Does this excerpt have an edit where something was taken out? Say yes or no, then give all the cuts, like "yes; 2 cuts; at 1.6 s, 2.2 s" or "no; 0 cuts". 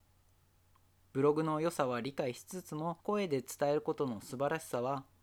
yes; 1 cut; at 3.0 s